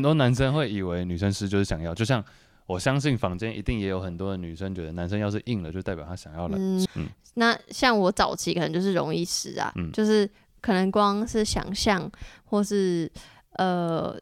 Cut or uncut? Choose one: cut